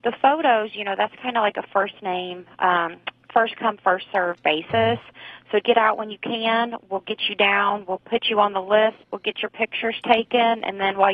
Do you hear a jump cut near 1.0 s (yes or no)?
no